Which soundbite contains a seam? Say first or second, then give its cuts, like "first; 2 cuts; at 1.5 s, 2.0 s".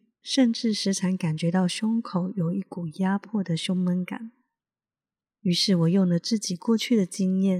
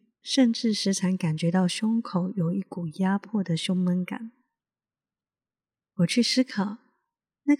first; 1 cut; at 5.3 s